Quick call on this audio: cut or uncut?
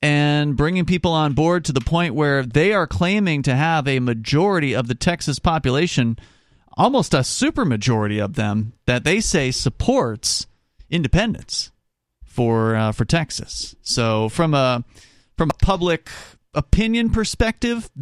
uncut